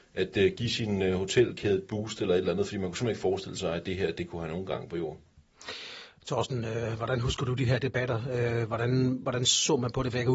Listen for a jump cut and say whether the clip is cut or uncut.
uncut